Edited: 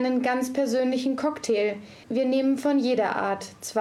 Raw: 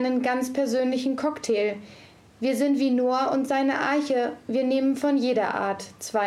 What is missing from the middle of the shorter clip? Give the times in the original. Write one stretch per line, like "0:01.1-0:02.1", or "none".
0:02.0-0:04.4